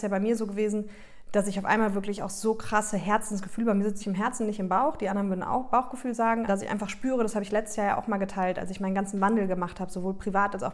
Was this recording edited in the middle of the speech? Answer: yes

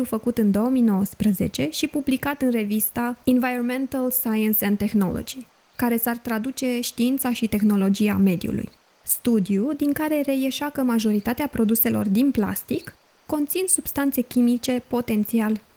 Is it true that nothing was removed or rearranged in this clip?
yes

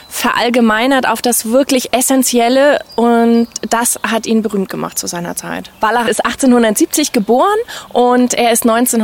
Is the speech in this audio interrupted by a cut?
yes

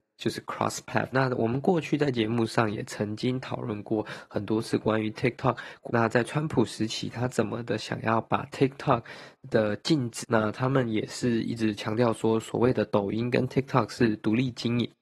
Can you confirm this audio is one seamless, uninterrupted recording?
no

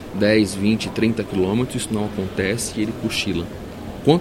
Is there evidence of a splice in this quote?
no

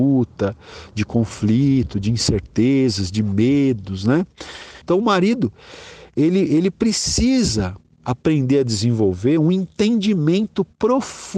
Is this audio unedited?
no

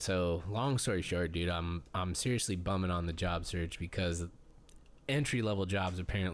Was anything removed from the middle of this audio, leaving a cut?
yes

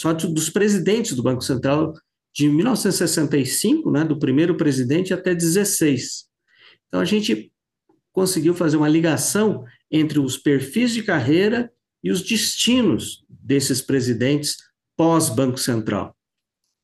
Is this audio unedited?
yes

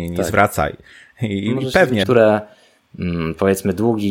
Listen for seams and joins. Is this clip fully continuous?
no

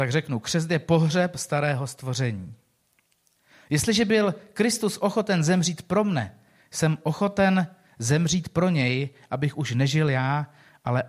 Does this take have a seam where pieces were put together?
no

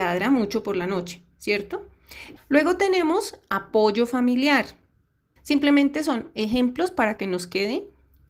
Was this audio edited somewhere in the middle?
yes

